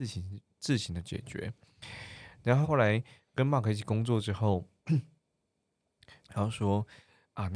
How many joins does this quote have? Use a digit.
2